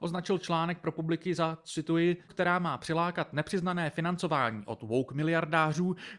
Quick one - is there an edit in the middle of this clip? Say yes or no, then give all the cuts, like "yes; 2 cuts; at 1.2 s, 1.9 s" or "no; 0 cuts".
yes; 1 cut; at 2.3 s